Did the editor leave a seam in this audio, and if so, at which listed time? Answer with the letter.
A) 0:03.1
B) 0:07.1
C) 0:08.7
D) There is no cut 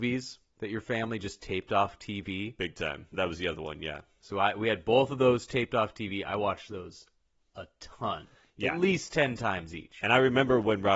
A